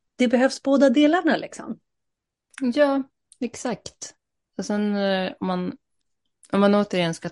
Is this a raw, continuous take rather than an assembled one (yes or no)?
yes